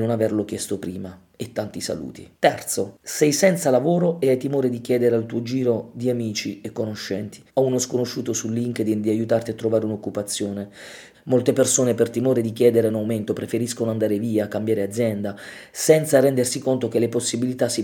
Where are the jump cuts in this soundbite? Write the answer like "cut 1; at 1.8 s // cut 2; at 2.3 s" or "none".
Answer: cut 1; at 7.5 s // cut 2; at 11.1 s